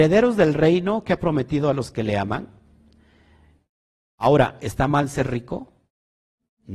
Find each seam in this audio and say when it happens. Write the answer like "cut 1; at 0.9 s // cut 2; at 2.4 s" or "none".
none